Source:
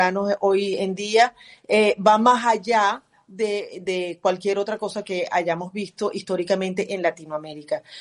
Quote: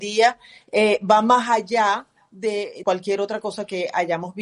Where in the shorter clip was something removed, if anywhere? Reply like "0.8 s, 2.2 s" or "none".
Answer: 2.8 s